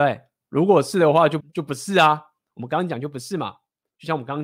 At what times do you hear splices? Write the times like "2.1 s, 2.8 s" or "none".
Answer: 1.4 s